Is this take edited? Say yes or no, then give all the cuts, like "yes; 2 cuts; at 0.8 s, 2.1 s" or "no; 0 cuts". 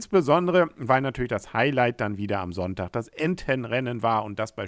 no; 0 cuts